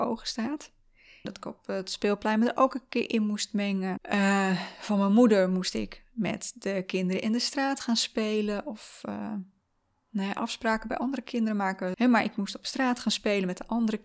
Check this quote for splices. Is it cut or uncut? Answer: cut